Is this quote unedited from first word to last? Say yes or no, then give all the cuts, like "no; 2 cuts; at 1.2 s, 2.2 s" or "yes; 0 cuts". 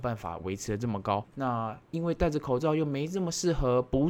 no; 1 cut; at 1.3 s